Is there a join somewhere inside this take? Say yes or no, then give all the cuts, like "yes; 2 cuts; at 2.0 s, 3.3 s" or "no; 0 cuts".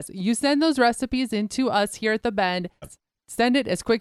yes; 1 cut; at 2.8 s